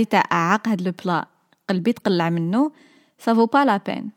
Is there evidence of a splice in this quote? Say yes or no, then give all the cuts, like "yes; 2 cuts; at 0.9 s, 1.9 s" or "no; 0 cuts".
no; 0 cuts